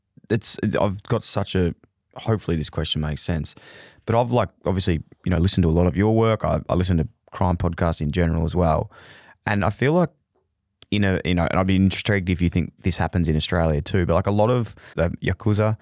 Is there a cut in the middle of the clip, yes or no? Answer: yes